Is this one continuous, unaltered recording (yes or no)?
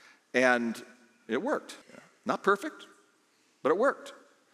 no